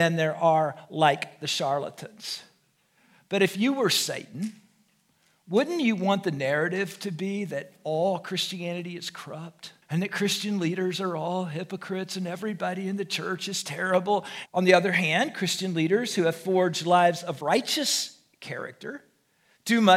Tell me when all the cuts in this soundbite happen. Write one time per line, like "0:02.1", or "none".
0:09.8
0:14.5